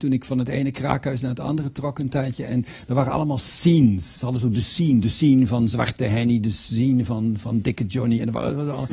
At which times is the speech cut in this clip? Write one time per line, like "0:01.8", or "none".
none